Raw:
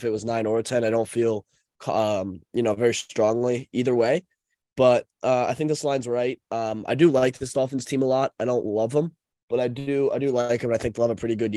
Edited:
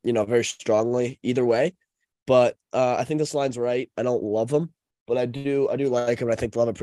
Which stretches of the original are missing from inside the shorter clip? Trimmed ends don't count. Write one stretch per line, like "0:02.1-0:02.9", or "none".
0:06.4-0:08.3